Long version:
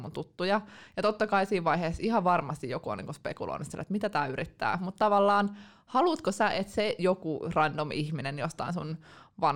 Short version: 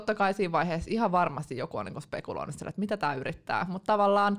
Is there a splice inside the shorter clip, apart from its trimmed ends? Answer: no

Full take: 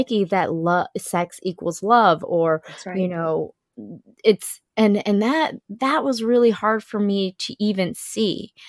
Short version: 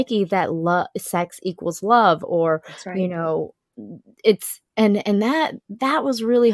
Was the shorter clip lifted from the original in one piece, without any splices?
yes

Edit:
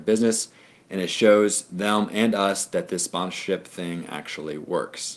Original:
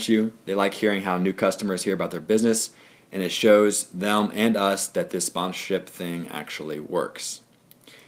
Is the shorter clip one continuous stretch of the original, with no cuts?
yes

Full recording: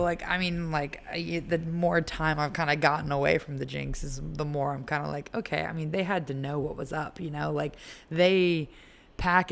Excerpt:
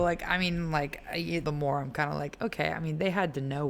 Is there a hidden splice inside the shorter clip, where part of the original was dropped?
yes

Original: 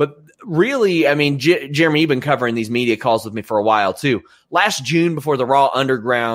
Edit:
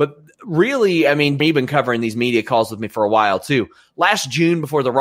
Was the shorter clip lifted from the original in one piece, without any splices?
no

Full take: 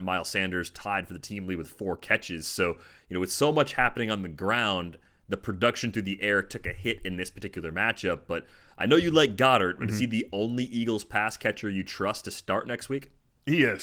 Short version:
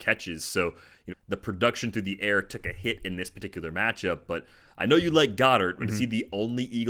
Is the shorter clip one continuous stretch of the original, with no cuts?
no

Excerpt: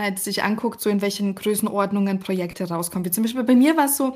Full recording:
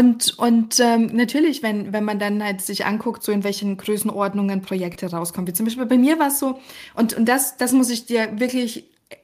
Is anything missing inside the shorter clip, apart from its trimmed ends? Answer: no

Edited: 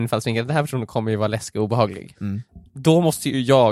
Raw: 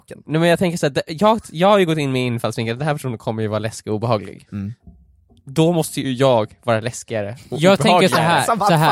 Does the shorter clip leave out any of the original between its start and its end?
yes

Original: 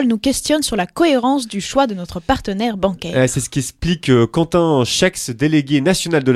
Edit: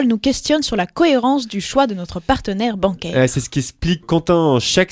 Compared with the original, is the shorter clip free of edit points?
no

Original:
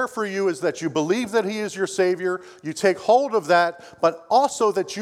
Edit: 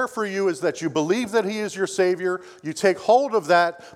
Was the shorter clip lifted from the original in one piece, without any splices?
yes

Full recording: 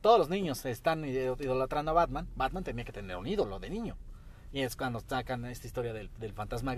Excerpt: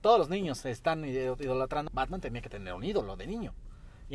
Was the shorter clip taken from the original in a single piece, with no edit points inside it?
no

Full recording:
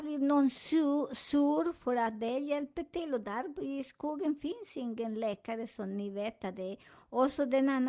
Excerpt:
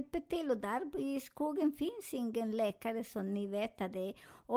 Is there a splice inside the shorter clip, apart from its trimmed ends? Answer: no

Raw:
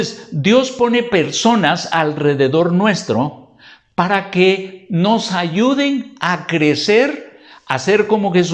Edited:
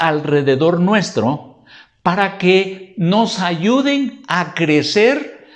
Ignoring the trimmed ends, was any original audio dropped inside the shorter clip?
no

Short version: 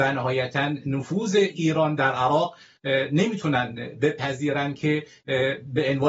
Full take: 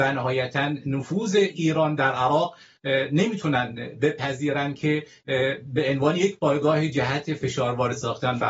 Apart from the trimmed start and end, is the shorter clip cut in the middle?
no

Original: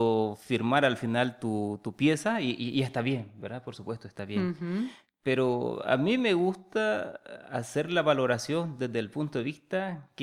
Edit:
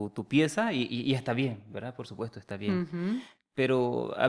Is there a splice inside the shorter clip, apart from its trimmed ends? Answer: no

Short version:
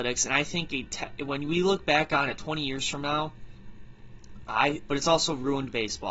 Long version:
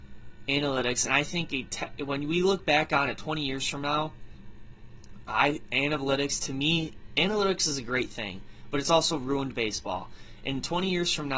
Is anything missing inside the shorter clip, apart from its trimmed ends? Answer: yes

